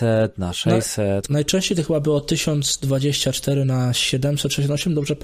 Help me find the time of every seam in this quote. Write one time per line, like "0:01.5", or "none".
0:01.3

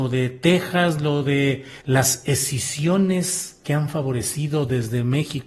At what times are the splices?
0:01.8
0:03.6

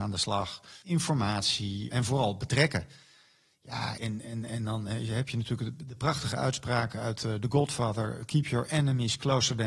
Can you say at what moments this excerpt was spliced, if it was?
0:04.0

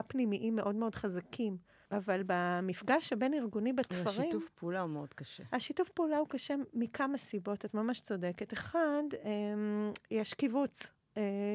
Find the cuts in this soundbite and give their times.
0:01.9

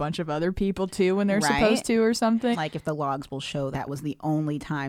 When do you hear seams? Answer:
0:02.5
0:03.7

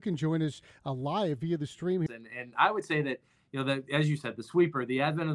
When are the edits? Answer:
0:02.1

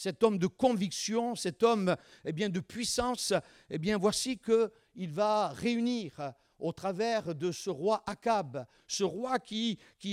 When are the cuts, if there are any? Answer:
0:08.8

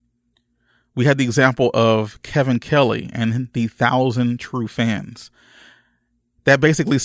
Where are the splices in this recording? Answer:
none

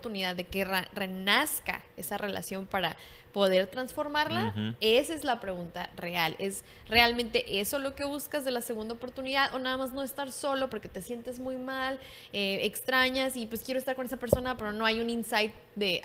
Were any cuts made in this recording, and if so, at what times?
none

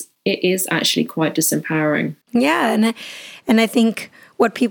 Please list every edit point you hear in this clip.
0:02.2

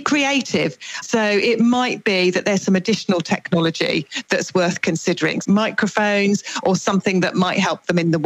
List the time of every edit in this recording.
0:01.0
0:05.4

